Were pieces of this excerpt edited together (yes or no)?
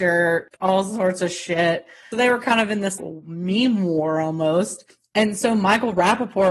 no